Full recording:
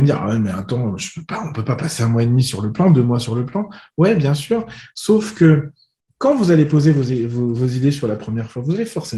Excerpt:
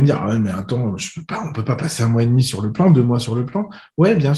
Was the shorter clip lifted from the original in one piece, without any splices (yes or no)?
yes